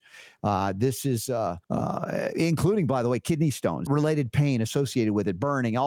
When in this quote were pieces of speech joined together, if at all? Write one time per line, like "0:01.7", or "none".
0:01.6
0:03.9